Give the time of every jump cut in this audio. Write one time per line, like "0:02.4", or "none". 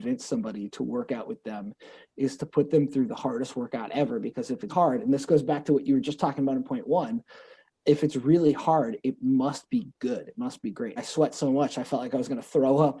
0:04.7
0:11.0